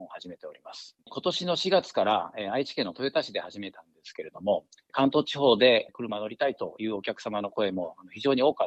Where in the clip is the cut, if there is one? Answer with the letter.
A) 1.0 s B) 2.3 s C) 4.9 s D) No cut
D